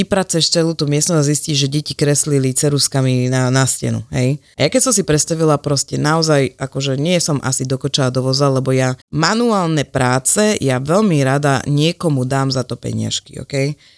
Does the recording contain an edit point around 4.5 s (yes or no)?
yes